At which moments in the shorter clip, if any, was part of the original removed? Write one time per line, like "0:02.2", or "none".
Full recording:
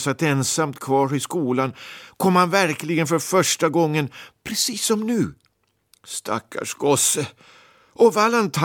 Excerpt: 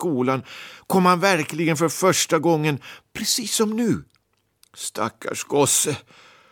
none